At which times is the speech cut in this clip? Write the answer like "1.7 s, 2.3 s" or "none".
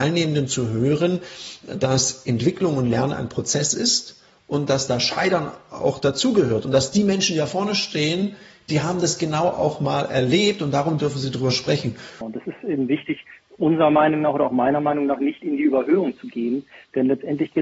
12.2 s

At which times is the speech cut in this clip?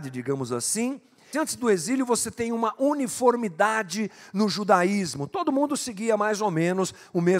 1.3 s

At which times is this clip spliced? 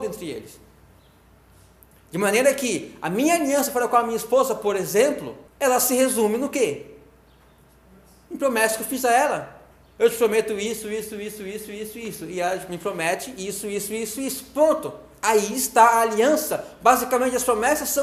5.5 s

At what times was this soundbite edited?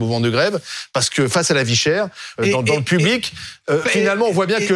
2.4 s, 3.8 s

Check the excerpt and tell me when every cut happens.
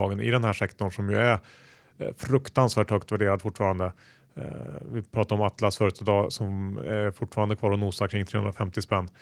none

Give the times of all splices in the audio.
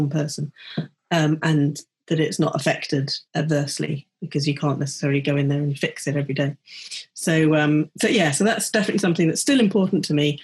3.3 s

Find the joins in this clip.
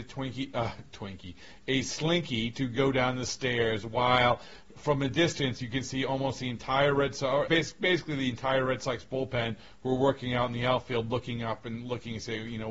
7.5 s

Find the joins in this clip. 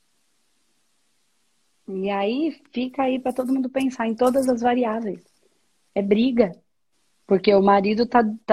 7.2 s

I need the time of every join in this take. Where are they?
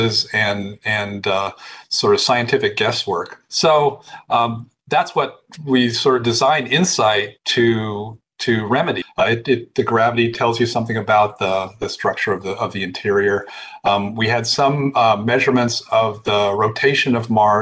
9.0 s

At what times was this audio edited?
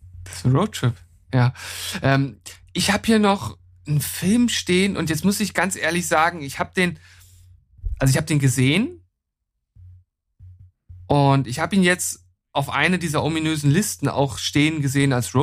none

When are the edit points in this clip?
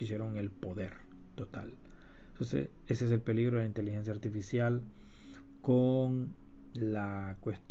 none

